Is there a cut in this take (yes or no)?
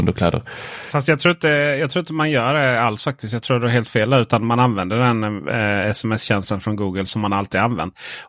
no